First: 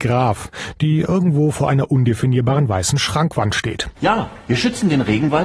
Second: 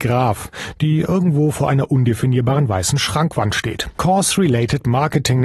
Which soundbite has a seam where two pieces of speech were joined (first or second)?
second